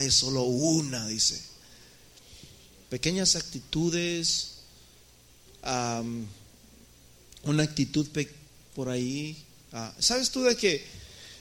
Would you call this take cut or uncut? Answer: cut